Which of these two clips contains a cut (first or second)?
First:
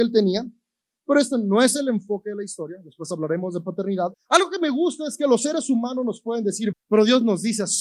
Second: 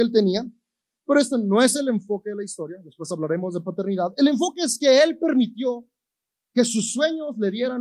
first